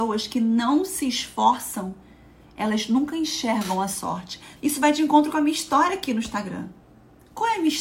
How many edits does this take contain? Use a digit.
1